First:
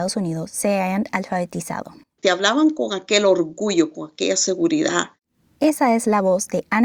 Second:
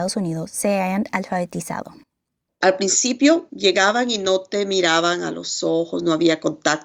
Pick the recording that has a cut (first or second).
first